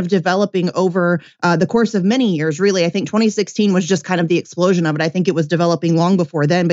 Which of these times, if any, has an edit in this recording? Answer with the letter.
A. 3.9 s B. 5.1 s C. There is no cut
C